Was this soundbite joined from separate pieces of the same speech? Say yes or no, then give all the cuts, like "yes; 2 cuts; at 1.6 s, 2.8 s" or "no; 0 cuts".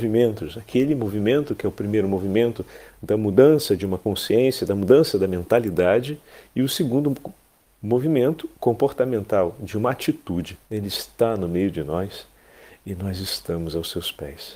yes; 1 cut; at 10.7 s